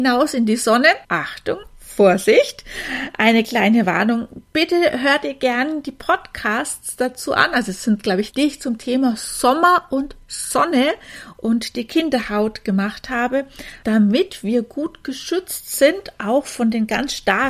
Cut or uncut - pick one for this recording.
cut